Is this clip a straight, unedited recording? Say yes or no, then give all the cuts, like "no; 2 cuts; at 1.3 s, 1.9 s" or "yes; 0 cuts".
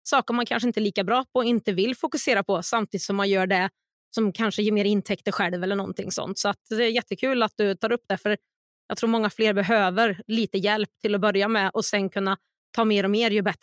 yes; 0 cuts